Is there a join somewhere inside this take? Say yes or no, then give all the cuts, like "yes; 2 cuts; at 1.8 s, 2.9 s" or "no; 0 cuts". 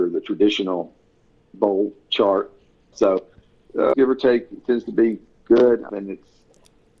yes; 3 cuts; at 2.9 s, 3.9 s, 5.9 s